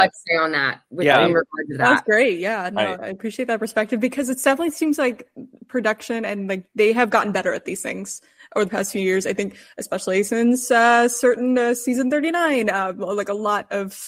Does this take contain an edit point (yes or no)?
no